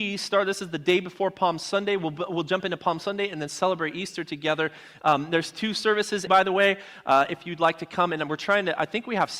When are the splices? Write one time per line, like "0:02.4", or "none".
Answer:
0:06.3